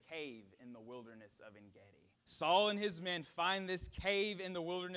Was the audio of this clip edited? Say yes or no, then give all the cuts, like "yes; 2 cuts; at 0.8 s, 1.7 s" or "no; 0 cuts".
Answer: yes; 1 cut; at 2.2 s